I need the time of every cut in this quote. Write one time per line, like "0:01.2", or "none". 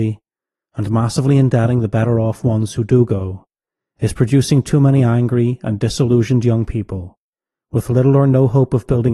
none